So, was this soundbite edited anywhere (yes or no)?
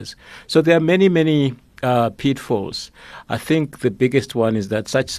no